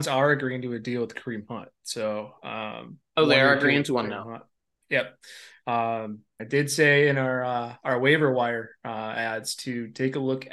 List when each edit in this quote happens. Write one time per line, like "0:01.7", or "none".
0:06.4